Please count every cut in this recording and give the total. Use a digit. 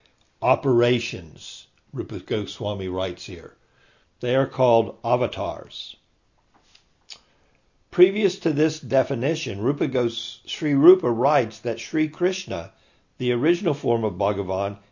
1